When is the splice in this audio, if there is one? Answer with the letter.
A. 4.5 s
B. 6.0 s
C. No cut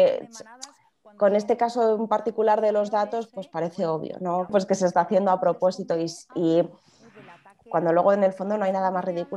A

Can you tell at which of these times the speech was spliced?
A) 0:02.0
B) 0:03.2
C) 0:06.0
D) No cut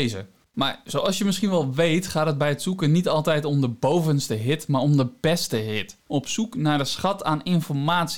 C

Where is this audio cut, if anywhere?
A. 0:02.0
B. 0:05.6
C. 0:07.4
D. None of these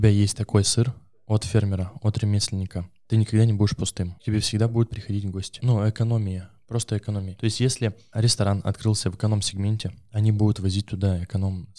B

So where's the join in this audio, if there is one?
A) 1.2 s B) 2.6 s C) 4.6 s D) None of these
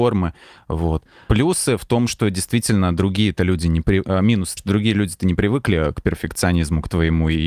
C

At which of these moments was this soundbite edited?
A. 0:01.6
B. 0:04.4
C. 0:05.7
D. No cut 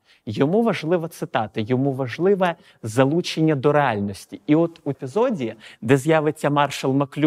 D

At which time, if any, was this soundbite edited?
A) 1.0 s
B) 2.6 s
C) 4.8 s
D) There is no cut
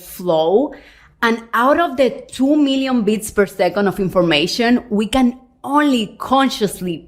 D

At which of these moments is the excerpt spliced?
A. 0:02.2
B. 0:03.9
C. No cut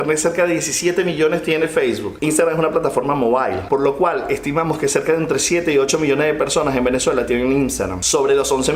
C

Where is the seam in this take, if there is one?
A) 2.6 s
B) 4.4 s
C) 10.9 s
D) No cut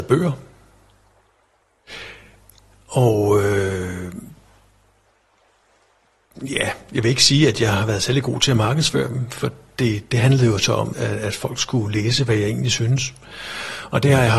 C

